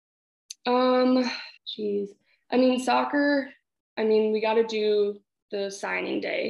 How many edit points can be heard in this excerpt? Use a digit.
1